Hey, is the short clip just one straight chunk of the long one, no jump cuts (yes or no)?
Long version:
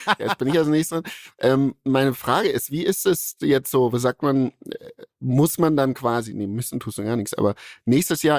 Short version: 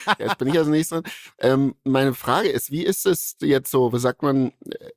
yes